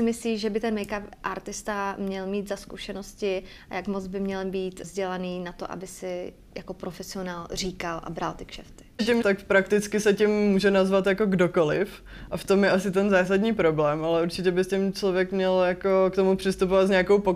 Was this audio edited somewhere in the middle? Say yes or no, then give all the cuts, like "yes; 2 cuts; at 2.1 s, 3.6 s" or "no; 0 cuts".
yes; 2 cuts; at 4.8 s, 9.2 s